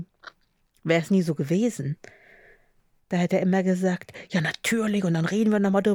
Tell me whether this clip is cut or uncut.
uncut